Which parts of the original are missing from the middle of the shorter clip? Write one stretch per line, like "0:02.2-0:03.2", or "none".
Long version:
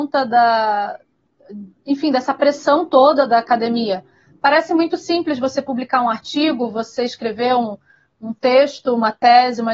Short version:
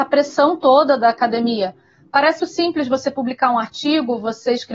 0:04.7-0:04.9